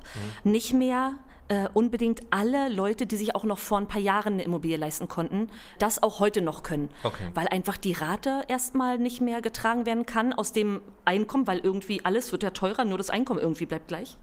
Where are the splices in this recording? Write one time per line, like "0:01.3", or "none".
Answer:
none